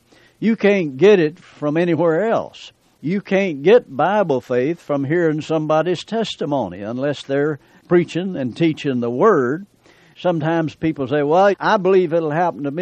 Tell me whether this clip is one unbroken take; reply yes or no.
no